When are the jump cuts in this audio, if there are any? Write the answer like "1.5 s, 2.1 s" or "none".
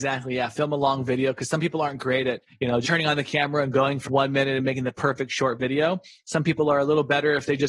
2.8 s, 4.0 s